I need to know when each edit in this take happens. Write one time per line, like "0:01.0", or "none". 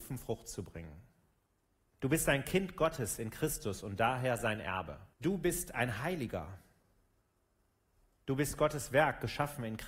0:01.9
0:05.1